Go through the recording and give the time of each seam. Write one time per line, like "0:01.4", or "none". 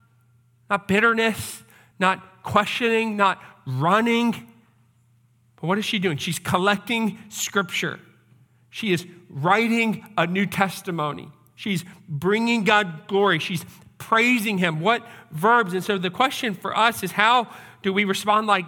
none